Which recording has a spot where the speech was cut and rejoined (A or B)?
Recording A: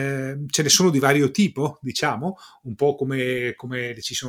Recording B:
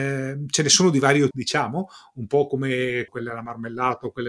B